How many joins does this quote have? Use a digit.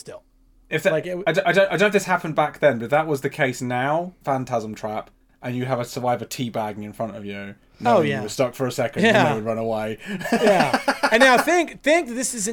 1